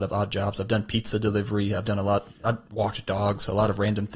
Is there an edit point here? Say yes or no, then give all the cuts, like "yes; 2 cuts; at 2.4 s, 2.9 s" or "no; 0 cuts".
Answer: no; 0 cuts